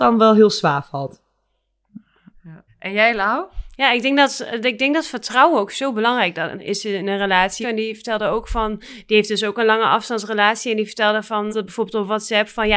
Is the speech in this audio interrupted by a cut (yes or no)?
yes